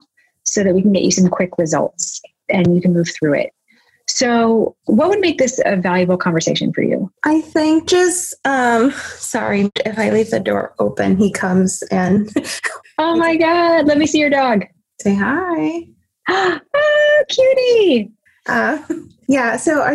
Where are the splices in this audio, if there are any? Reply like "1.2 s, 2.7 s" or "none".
7.2 s